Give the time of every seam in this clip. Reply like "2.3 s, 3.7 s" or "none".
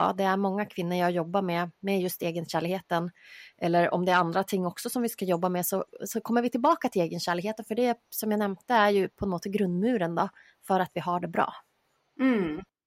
none